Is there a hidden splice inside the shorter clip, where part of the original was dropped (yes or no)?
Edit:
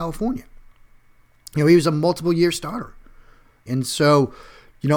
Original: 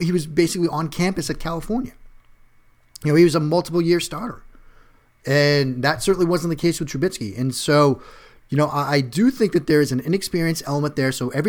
yes